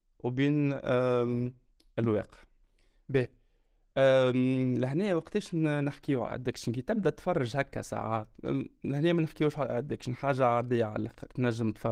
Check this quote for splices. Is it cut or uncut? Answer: uncut